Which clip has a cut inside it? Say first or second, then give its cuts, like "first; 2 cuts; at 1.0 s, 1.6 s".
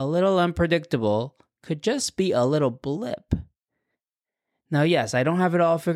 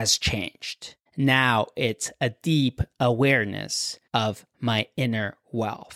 second; 2 cuts; at 1.1 s, 4.1 s